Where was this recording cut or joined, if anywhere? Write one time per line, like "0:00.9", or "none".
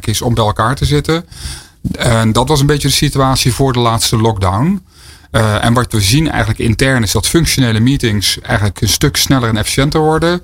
none